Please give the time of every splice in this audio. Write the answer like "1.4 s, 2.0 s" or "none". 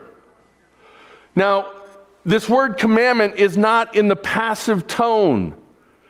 none